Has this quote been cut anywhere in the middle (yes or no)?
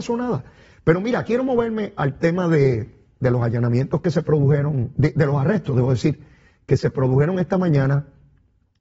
no